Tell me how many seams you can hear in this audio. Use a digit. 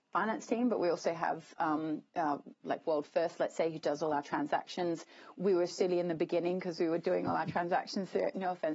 2